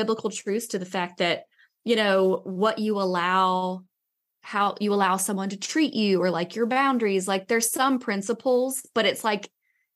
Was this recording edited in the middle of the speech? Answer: no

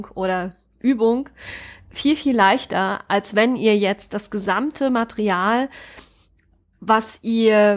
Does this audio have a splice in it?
no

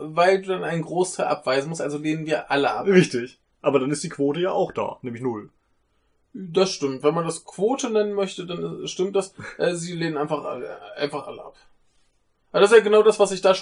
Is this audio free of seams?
yes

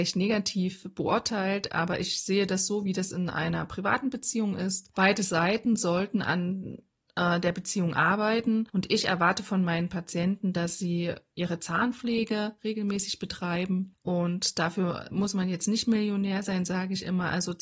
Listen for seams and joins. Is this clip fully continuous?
yes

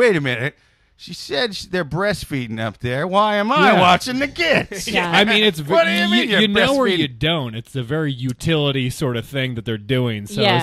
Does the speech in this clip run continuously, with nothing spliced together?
yes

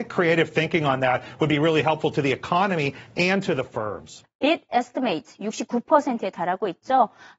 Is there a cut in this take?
yes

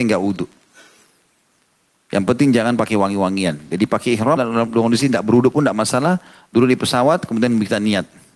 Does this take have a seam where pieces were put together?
yes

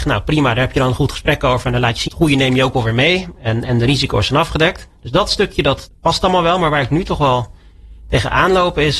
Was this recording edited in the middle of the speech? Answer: yes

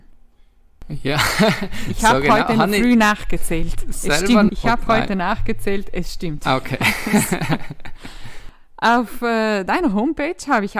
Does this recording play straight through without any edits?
no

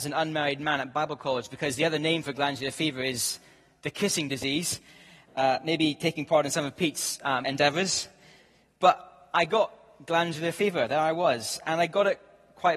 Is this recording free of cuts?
no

